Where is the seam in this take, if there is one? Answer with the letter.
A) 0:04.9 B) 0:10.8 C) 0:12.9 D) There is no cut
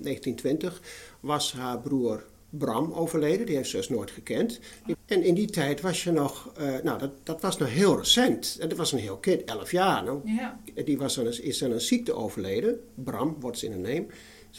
A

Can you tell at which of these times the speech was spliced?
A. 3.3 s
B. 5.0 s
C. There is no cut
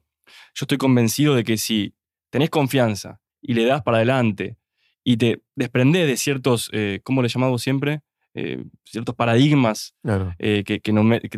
A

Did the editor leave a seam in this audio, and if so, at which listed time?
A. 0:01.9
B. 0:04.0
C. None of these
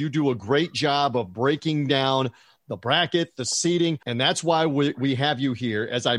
B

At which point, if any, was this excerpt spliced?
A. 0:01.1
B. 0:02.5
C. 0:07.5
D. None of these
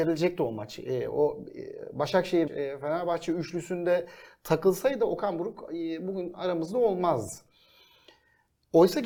B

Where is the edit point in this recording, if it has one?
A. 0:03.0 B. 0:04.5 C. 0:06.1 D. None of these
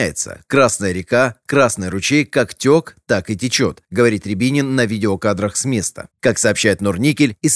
C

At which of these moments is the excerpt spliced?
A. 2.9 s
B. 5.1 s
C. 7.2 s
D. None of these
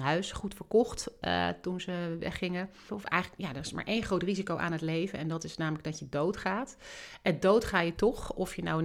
A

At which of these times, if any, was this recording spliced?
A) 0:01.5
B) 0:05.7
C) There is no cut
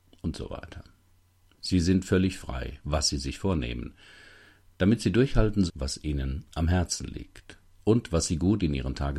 B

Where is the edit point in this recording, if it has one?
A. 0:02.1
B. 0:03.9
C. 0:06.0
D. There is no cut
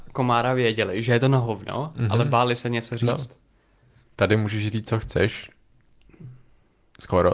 D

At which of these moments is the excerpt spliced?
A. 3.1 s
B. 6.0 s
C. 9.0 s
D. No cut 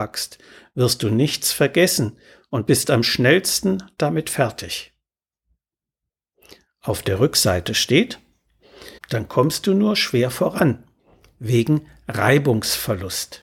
C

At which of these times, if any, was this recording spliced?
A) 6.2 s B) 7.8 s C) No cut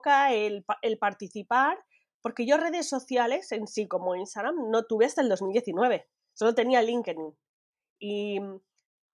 A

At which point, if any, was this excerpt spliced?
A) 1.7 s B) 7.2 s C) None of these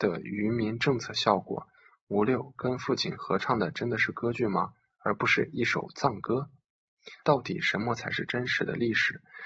B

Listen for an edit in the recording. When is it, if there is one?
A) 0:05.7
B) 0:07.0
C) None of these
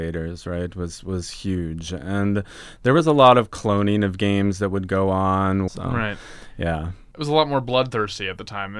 A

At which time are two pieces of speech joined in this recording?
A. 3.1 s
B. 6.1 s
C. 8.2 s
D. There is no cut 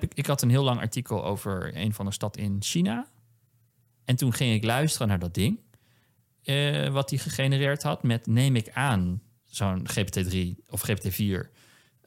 D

